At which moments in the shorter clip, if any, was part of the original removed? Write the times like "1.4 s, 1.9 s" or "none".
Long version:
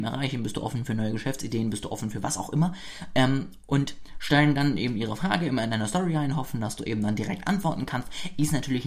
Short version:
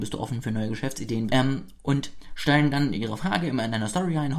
1.3 s, 2.9 s